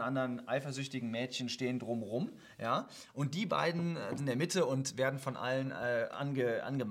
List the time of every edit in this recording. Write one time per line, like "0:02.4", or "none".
0:04.2